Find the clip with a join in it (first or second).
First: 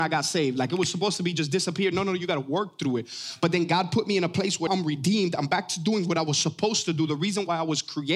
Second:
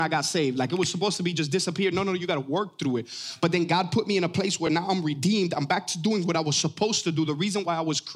first